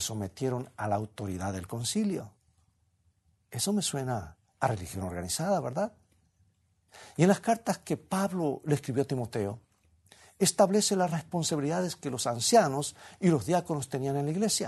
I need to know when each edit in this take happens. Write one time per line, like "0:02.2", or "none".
none